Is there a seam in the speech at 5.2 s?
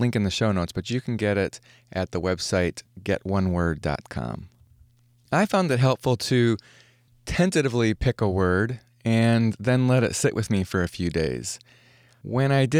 no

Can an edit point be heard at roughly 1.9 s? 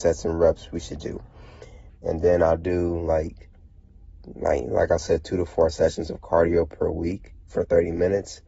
yes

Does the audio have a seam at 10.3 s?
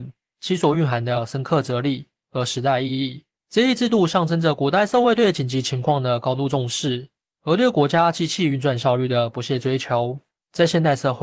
no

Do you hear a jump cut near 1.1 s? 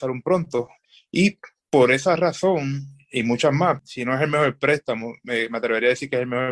no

